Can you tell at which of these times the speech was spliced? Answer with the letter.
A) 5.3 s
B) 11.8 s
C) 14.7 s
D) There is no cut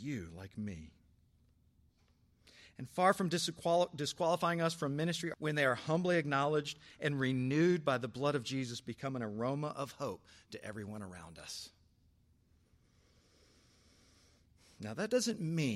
A